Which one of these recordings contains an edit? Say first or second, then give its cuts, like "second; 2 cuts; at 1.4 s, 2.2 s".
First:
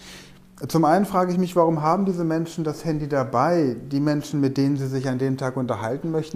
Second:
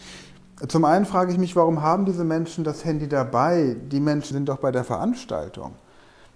second; 1 cut; at 4.3 s